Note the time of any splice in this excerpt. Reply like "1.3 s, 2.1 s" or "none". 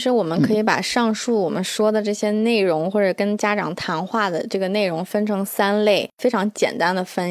none